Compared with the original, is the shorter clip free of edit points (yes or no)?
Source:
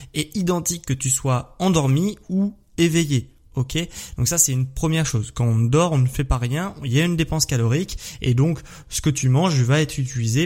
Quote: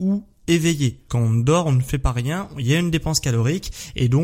no